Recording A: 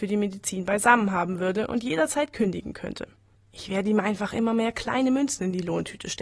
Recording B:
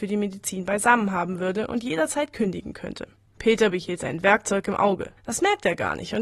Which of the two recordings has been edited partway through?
B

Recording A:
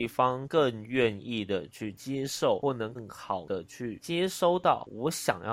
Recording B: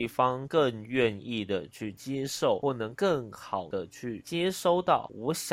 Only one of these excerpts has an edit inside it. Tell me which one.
A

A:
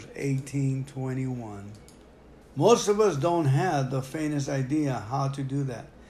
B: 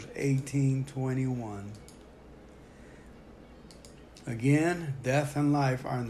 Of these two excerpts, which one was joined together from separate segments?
A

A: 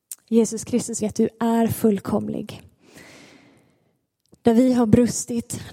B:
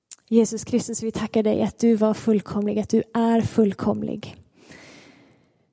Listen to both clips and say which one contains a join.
A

